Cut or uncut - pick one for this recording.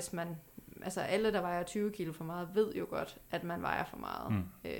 uncut